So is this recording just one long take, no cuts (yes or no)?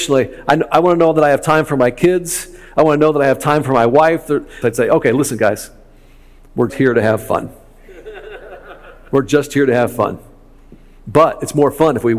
no